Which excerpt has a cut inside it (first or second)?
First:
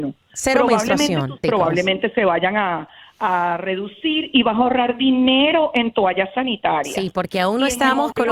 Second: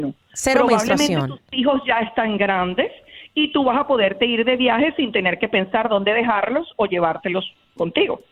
first